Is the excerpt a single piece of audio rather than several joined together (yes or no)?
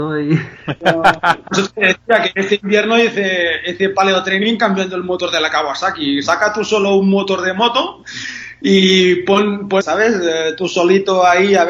no